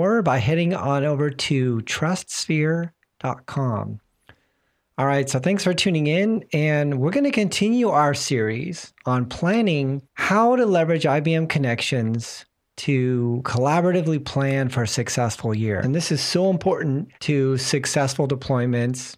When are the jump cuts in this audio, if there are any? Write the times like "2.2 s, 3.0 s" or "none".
10.1 s, 15.8 s, 17.1 s